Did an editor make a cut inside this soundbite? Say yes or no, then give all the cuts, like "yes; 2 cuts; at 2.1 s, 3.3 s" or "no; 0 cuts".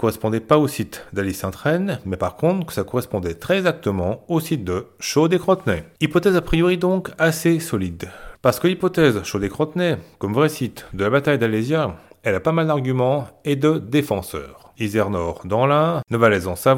yes; 2 cuts; at 8.3 s, 14.7 s